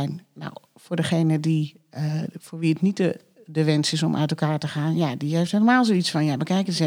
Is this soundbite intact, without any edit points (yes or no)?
yes